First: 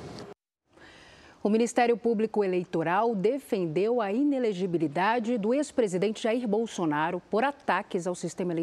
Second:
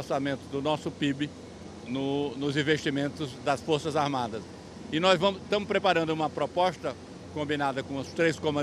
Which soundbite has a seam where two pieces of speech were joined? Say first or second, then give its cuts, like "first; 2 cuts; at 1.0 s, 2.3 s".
second; 1 cut; at 1.8 s